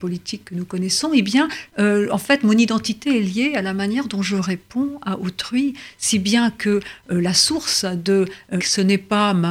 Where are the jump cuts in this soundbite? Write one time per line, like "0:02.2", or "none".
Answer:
0:01.7
0:08.6